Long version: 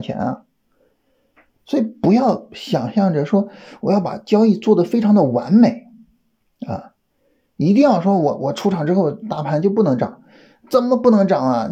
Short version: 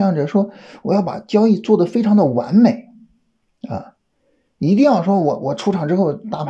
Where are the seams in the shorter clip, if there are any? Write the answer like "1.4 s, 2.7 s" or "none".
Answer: none